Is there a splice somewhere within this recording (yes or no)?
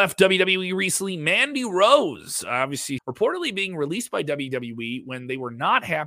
yes